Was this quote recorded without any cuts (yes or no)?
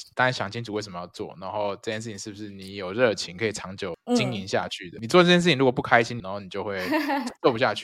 no